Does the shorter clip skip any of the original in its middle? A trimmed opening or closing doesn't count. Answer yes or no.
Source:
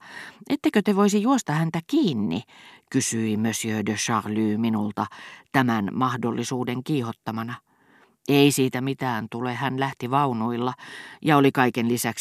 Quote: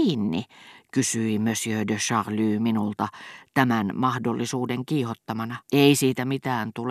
yes